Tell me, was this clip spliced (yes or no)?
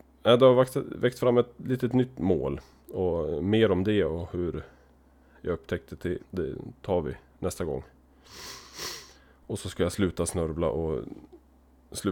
yes